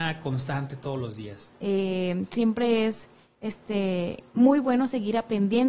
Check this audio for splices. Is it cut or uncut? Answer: cut